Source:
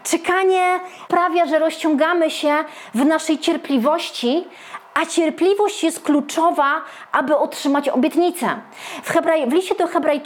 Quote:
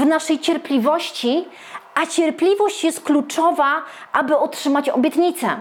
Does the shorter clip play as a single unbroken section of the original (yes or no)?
yes